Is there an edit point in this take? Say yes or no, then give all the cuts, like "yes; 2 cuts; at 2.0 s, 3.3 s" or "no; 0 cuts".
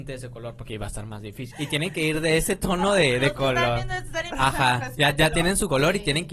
yes; 2 cuts; at 1.5 s, 4.3 s